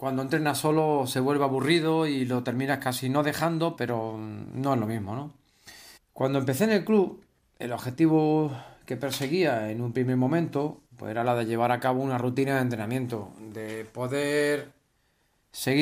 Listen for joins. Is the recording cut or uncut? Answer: cut